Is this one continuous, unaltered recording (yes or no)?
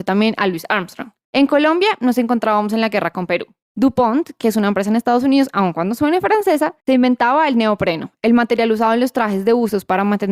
yes